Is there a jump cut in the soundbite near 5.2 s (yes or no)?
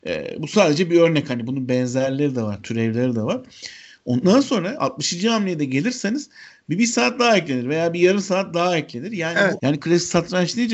no